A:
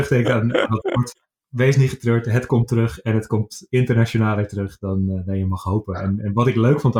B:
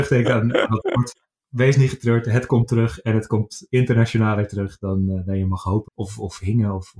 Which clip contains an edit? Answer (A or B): B